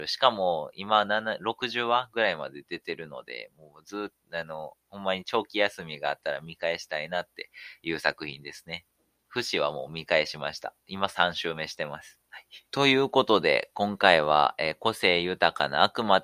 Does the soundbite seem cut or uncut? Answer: cut